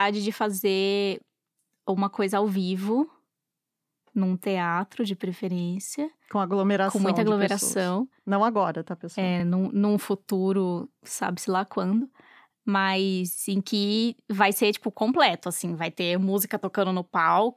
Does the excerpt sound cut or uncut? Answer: uncut